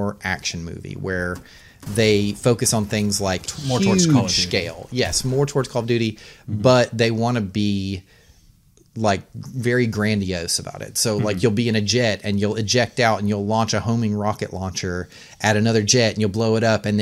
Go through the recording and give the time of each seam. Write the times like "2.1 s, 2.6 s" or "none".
none